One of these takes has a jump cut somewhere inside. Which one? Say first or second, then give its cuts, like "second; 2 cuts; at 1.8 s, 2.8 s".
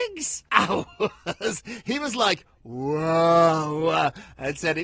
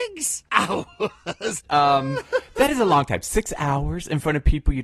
second; 1 cut; at 1.6 s